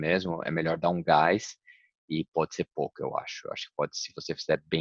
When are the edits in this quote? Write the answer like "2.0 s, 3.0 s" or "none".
2.7 s